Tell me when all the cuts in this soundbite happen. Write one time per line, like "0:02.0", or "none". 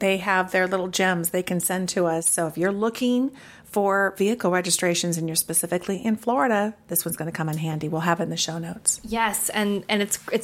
none